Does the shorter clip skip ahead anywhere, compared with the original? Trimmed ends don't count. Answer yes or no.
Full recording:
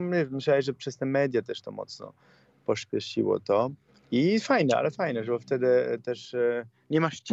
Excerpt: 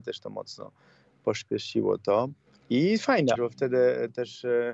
yes